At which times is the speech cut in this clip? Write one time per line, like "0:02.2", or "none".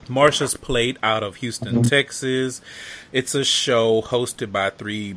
none